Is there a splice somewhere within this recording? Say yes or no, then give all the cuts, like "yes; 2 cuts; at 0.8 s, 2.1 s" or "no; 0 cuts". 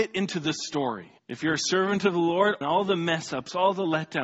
yes; 2 cuts; at 1.2 s, 2.6 s